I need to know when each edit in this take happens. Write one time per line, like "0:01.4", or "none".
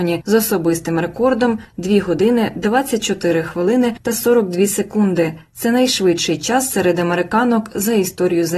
none

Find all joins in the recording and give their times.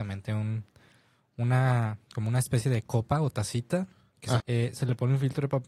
0:04.4

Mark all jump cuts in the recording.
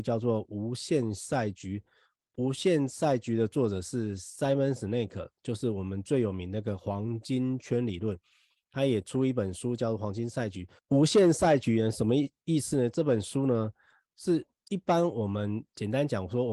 none

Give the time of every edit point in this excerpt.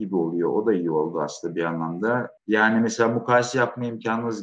0:02.4

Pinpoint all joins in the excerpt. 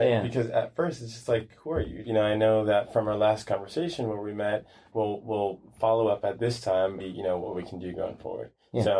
0:02.0
0:04.9
0:07.0

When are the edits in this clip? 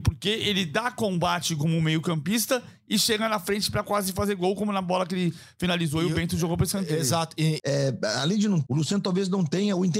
0:07.6
0:08.7

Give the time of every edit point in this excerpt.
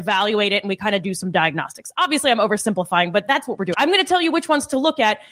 0:03.7

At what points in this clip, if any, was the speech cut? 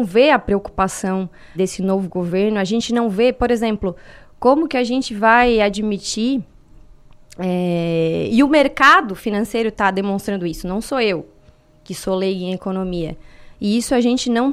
0:01.5
0:08.3
0:13.5

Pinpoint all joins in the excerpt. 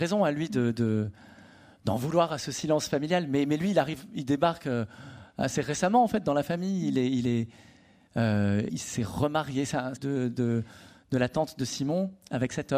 0:08.7
0:10.0

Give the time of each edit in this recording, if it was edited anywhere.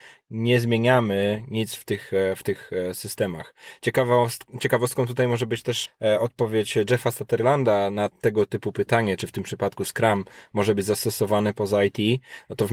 0:05.8
0:09.2

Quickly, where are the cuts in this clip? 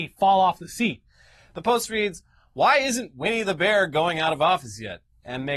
0:01.5

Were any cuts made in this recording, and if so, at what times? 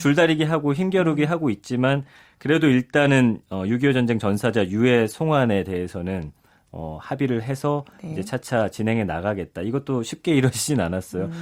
none

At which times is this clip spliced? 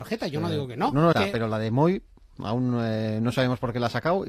0:01.1

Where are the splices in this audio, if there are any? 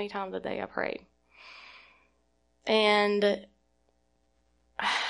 none

